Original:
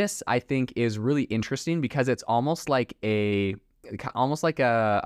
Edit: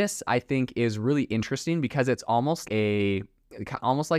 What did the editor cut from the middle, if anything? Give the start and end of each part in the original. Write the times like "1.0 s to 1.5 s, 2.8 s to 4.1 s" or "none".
2.7 s to 3.0 s